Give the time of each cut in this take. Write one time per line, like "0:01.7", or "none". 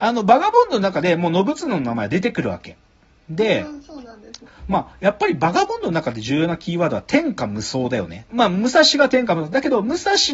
0:04.5
0:08.3